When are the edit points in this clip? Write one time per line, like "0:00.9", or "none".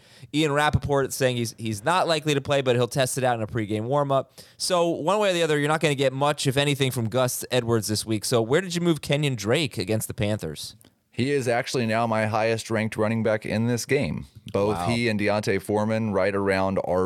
none